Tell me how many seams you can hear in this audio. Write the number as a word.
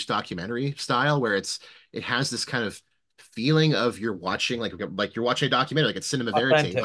one